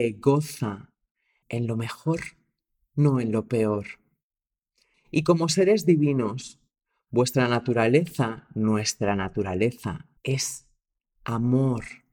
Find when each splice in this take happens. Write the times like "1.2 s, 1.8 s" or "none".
1.4 s, 4.9 s, 10.2 s